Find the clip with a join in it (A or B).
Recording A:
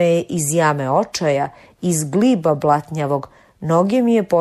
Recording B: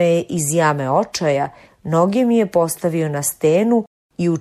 B